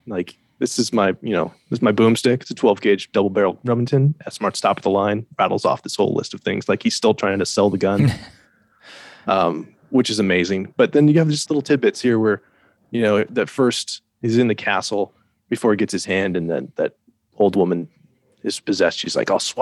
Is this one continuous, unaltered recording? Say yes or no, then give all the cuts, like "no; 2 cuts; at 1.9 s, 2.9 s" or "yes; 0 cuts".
no; 1 cut; at 11.5 s